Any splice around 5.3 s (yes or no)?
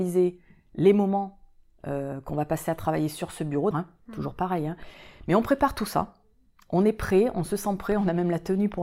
no